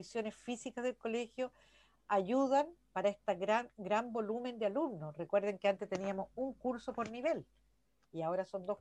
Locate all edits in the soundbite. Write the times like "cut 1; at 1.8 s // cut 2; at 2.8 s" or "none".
none